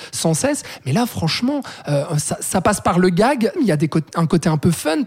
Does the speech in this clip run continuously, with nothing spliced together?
no; 1 cut; at 3.6 s

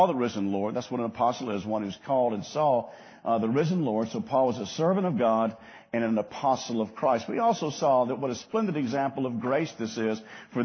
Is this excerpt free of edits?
yes; 0 cuts

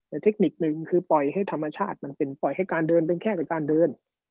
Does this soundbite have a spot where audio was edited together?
yes; 1 cut; at 2.4 s

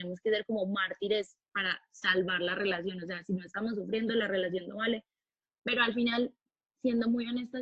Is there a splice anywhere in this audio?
no; 0 cuts

